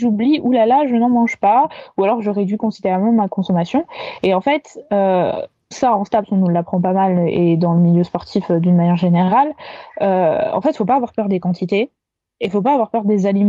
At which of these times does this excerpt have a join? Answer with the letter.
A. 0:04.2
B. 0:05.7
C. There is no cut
B